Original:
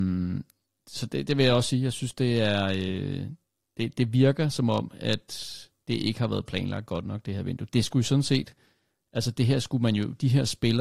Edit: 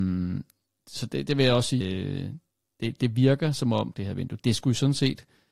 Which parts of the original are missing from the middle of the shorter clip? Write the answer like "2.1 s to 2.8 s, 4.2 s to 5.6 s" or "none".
1.8 s to 2.8 s, 4.9 s to 7.2 s

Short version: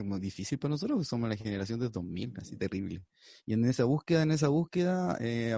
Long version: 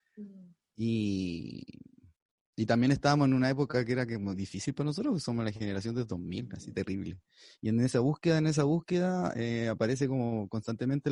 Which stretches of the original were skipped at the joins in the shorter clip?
none

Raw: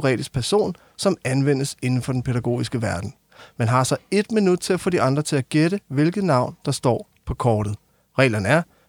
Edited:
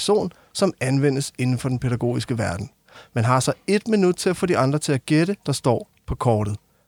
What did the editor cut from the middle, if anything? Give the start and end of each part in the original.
5.8 s to 6.6 s

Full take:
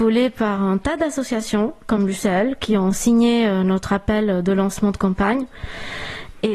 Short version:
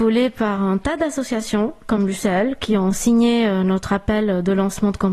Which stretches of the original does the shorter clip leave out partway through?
none

